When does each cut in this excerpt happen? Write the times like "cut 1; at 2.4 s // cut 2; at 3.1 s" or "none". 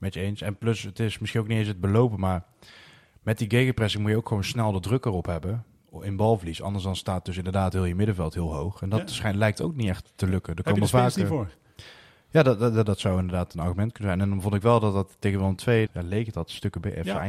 cut 1; at 15.9 s